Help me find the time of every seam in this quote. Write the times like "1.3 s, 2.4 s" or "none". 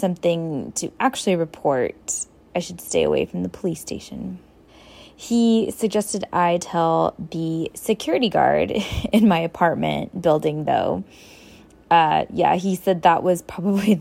4.7 s